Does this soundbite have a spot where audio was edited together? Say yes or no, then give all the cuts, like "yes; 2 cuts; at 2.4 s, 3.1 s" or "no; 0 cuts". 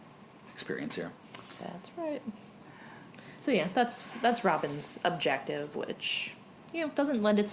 no; 0 cuts